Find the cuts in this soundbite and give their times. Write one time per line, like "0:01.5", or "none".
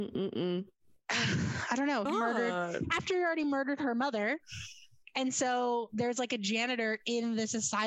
0:02.1